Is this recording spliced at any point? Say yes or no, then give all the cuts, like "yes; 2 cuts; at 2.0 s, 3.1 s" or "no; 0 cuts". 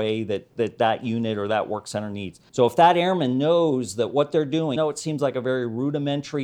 yes; 2 cuts; at 2.5 s, 4.8 s